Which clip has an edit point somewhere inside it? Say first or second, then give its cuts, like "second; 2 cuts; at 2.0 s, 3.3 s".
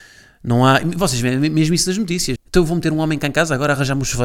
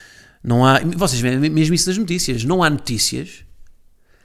first; 1 cut; at 2.4 s